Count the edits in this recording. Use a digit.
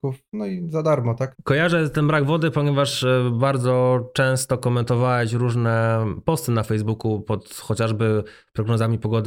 1